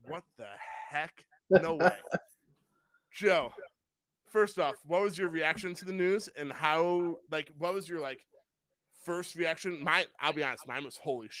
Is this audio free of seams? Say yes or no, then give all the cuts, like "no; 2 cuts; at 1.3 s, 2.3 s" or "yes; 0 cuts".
yes; 0 cuts